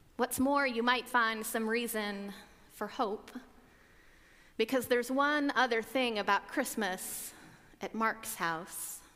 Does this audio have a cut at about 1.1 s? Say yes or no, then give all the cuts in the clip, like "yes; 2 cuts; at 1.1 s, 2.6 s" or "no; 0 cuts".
yes; 1 cut; at 1.1 s